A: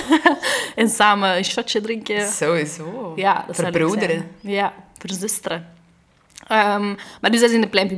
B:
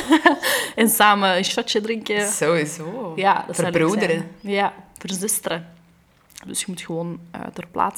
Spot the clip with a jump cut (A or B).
B